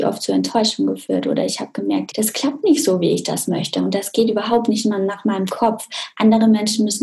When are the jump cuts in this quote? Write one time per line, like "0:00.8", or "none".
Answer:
0:02.1

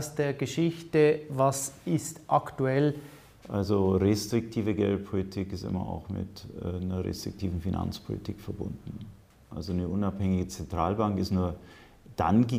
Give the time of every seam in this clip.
0:03.4
0:09.5

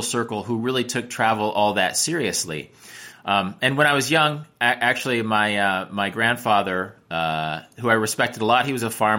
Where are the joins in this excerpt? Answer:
0:03.1

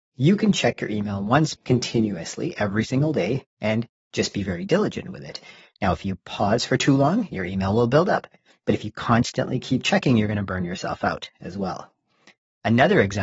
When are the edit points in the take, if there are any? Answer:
0:01.6

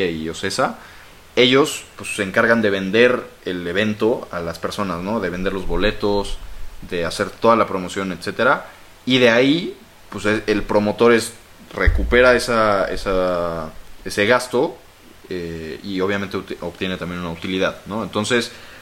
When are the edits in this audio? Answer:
0:01.2

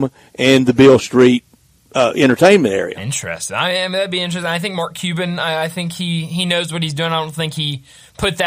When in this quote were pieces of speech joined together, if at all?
none

